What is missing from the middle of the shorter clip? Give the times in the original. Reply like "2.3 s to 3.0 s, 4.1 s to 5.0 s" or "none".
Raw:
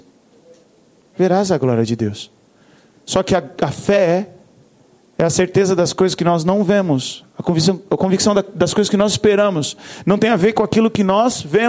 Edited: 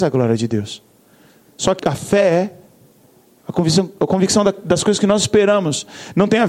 3.3 s to 3.6 s, 5.2 s to 7.3 s